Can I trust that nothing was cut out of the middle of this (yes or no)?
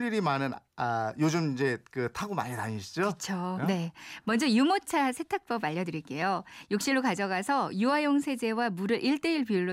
no